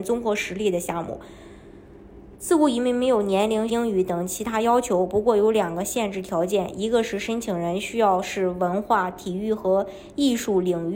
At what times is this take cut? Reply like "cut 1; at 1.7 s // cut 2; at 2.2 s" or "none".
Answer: cut 1; at 2.4 s // cut 2; at 3.7 s